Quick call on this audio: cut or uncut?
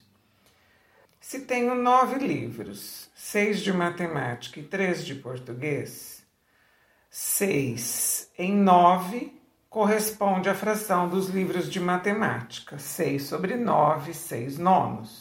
cut